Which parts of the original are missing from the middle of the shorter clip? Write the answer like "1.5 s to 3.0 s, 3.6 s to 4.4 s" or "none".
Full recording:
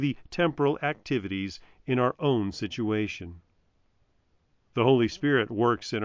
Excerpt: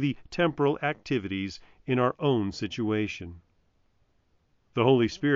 none